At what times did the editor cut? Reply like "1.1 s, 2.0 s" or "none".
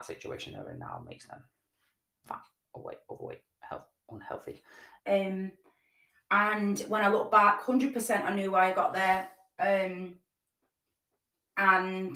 5.0 s